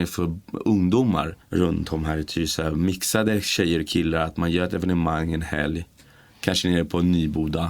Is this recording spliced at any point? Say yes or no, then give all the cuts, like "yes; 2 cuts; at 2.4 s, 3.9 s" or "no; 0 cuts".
yes; 1 cut; at 1.4 s